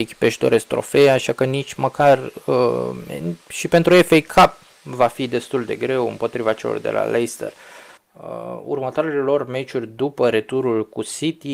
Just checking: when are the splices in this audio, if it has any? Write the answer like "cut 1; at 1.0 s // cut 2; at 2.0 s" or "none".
cut 1; at 8.0 s